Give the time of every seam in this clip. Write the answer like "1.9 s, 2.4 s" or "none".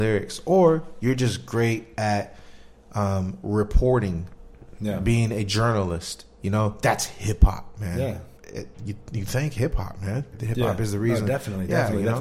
8.4 s, 10.3 s